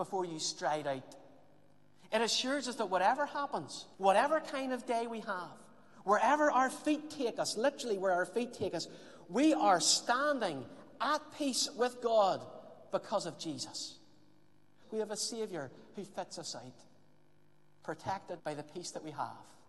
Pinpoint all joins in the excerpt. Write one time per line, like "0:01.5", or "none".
0:03.9
0:14.8
0:18.4

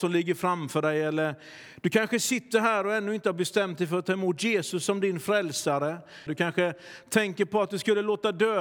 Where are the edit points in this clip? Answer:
0:06.3

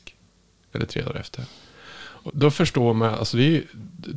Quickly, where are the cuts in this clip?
0:02.3

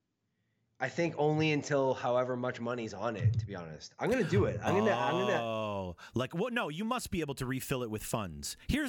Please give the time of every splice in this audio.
none

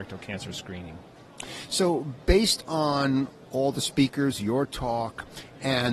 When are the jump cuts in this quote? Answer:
none

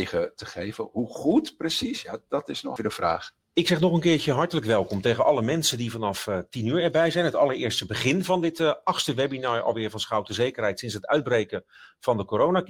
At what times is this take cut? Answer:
0:02.8

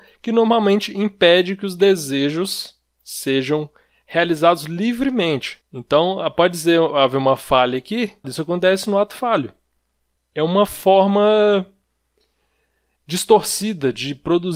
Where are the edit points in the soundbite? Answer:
0:05.6
0:08.2
0:10.2

